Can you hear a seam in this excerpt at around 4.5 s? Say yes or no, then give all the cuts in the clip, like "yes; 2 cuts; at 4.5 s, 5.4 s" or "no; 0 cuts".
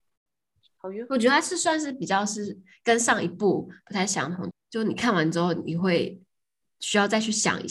yes; 1 cut; at 4.5 s